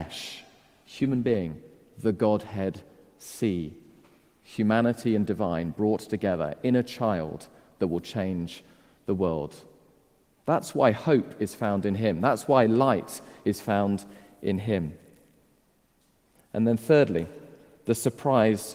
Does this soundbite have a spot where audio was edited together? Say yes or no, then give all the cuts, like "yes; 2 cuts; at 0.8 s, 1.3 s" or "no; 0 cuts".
no; 0 cuts